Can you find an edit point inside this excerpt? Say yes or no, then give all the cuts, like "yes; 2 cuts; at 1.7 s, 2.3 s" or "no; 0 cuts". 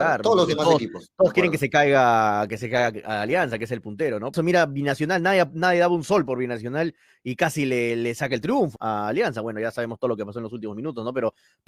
yes; 2 cuts; at 4.3 s, 8.8 s